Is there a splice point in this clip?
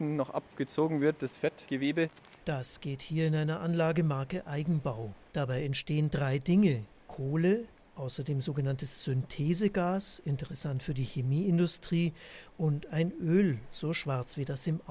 yes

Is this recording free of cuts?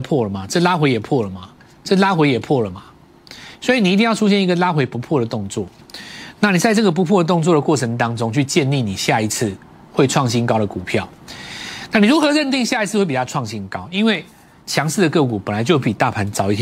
yes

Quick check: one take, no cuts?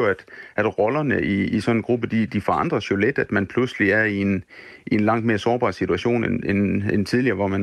yes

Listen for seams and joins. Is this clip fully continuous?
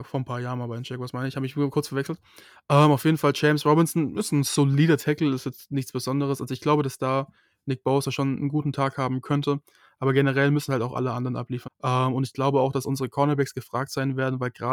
no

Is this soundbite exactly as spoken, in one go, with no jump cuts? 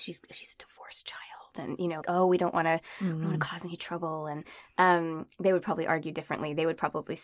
no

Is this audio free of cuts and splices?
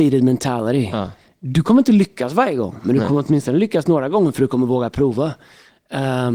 yes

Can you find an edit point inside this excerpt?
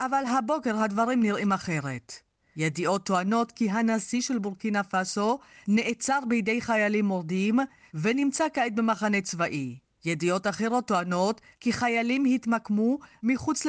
no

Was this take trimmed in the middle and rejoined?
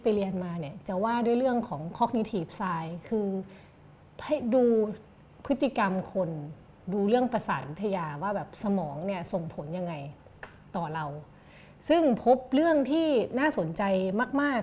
no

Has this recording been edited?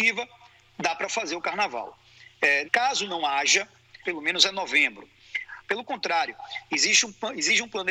yes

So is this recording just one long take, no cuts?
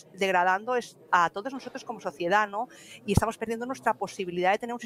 yes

